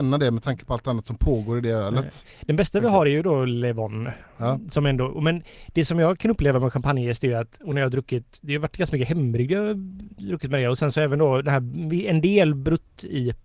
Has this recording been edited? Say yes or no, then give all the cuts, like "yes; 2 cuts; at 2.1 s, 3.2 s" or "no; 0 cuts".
no; 0 cuts